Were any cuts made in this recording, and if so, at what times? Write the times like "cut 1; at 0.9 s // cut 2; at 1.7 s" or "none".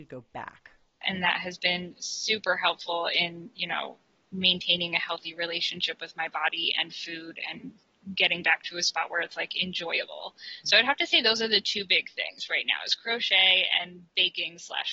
cut 1; at 1.0 s